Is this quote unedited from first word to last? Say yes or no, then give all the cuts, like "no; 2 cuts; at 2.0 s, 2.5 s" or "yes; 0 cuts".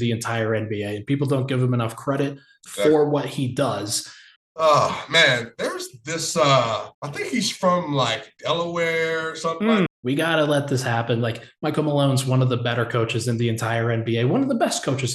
no; 3 cuts; at 4.4 s, 6.9 s, 9.9 s